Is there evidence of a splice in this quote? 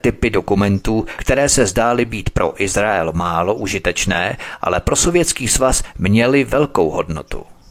no; 0 cuts

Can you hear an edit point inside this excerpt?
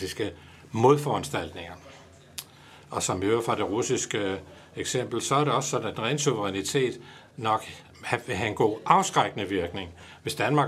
no; 0 cuts

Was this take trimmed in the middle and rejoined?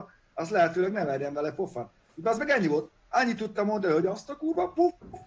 no; 0 cuts

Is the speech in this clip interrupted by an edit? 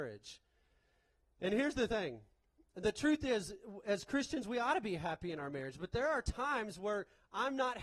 no; 0 cuts

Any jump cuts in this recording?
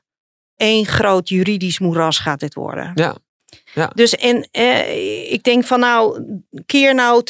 yes; 1 cut; at 4.2 s

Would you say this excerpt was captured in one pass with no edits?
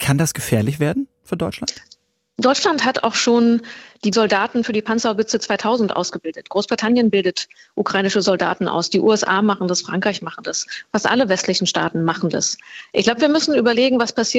yes; 0 cuts

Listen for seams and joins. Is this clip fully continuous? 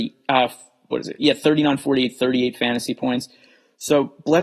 yes; 0 cuts

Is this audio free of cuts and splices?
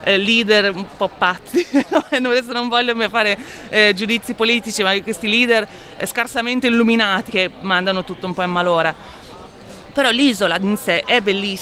no; 1 cut; at 7.3 s

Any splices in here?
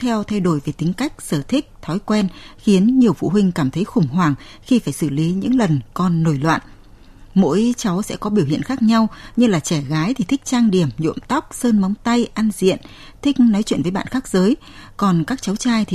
no; 0 cuts

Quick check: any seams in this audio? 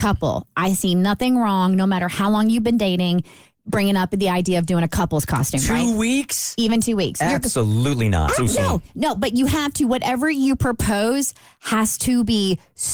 no; 0 cuts

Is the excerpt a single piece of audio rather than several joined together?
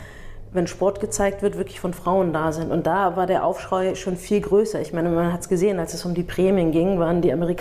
yes; 0 cuts

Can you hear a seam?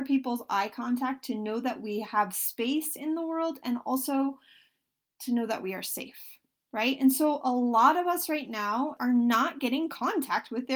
yes; 1 cut; at 9.0 s

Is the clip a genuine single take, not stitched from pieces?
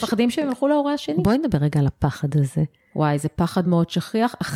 no; 1 cut; at 3.6 s

